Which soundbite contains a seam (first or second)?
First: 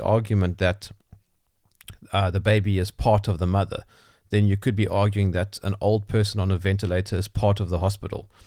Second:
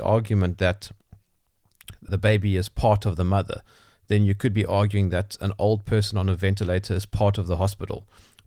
second